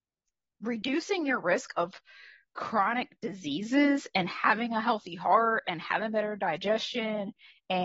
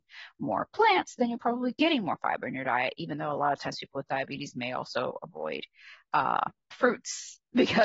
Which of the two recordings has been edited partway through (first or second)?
second